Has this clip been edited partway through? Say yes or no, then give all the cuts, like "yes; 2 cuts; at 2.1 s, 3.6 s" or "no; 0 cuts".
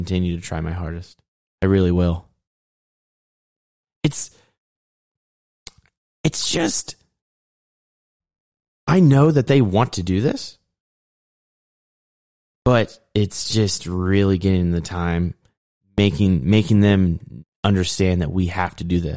no; 0 cuts